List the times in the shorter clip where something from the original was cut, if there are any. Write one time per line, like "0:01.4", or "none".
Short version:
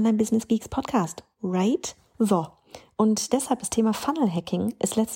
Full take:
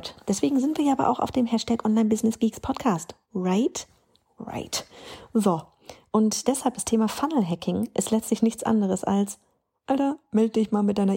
0:02.1

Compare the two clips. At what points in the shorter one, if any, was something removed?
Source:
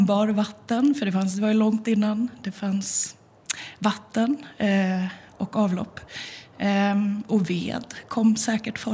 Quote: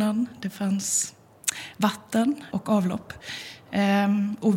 0:02.5

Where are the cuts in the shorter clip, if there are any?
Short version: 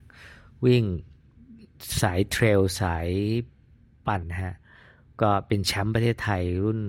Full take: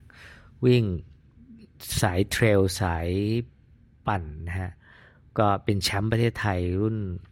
0:04.2

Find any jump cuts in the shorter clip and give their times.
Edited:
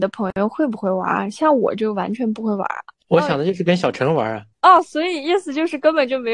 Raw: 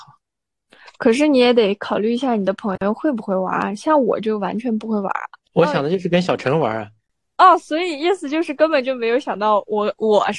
0:04.5

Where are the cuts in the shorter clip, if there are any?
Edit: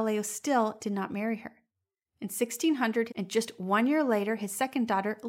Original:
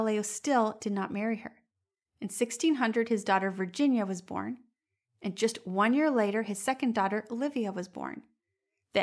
0:03.1

